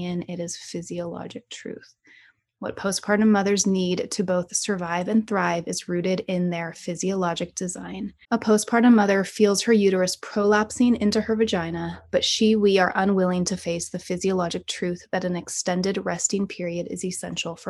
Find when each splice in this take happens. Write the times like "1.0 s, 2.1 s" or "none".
8.2 s